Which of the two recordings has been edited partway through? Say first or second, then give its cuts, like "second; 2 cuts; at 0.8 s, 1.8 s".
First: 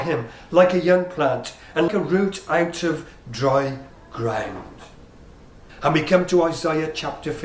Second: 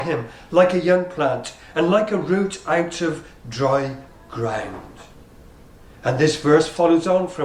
first; 2 cuts; at 1.9 s, 5.7 s